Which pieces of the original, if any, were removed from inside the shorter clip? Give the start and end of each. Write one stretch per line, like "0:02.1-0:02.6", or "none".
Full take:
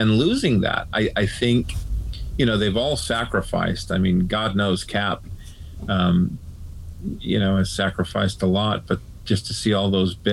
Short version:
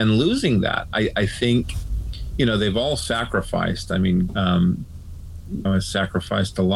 0:04.3-0:05.8
0:07.2-0:07.5